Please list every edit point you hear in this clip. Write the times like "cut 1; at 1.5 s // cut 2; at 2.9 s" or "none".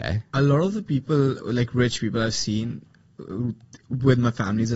cut 1; at 1.4 s